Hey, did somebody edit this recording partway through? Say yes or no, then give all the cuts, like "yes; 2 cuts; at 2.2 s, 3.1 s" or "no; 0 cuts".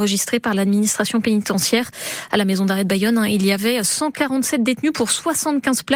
no; 0 cuts